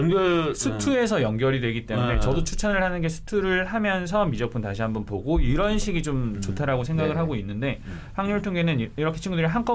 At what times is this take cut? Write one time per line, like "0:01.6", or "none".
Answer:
none